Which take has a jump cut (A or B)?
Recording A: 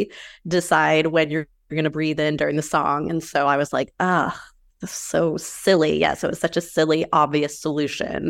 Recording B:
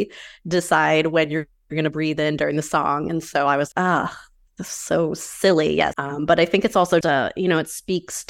B